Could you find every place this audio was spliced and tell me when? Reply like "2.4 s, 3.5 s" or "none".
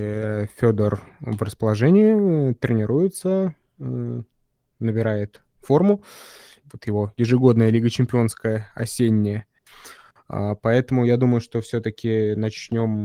6.6 s